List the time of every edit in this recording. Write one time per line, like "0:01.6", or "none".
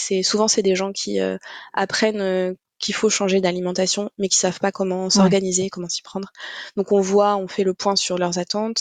none